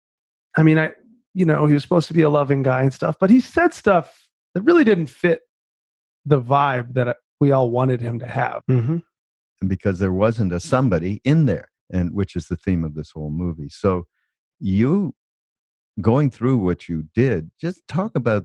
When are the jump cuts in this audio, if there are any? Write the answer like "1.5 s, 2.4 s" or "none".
8.6 s, 11.8 s